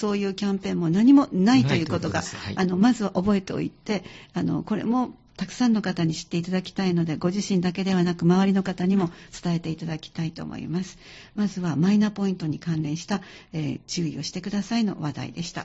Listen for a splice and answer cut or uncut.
uncut